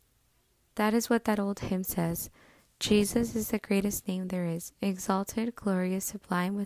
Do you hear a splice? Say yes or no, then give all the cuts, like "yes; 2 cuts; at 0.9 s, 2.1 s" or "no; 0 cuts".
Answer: no; 0 cuts